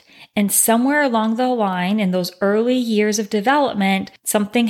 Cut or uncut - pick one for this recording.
uncut